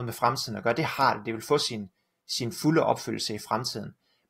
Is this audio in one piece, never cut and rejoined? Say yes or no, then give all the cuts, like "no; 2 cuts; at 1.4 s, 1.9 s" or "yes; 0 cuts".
yes; 0 cuts